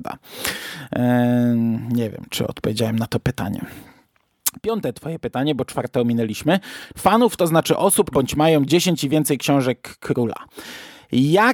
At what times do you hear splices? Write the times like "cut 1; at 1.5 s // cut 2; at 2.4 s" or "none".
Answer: cut 1; at 6.9 s // cut 2; at 8.1 s